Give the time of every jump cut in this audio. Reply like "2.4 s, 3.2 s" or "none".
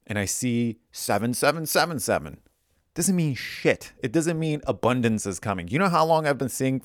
none